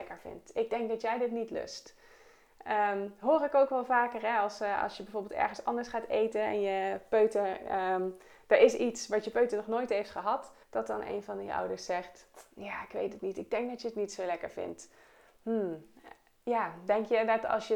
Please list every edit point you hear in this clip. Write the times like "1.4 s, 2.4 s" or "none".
10.6 s